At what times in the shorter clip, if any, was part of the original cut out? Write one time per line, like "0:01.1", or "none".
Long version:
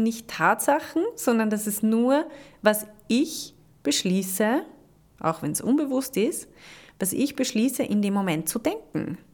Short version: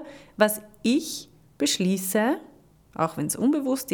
none